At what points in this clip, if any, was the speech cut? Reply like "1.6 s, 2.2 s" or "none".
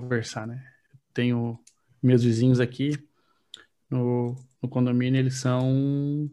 none